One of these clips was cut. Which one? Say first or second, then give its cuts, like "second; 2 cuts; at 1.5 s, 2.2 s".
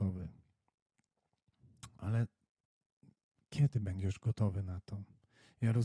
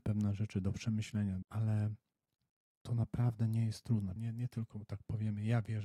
second; 2 cuts; at 1.4 s, 4.2 s